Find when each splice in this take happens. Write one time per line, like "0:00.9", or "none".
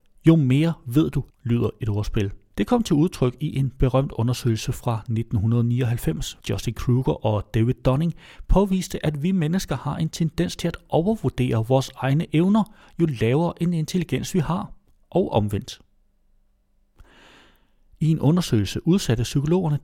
0:01.3
0:02.5
0:06.4

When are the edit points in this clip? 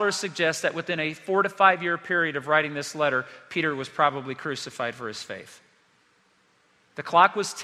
none

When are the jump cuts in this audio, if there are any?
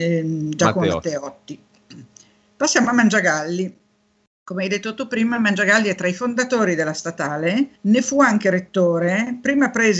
0:07.8

